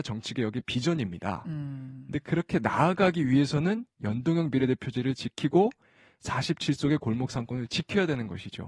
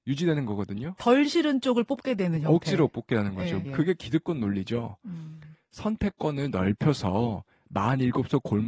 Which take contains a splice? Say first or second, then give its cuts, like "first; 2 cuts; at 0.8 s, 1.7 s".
second; 1 cut; at 3.6 s